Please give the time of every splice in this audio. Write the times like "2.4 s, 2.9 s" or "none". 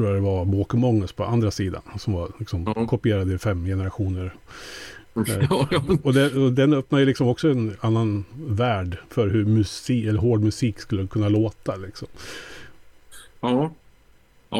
none